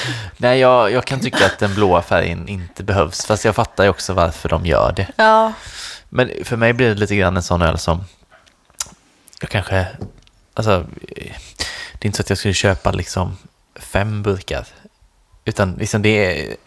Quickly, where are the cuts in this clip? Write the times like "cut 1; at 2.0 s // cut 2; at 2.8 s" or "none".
none